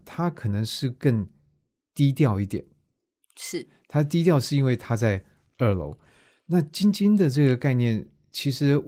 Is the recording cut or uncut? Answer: uncut